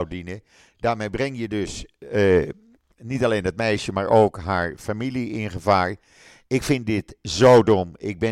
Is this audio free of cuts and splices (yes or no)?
yes